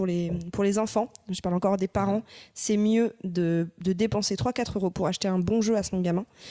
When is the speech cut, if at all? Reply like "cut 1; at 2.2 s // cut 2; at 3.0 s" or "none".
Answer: none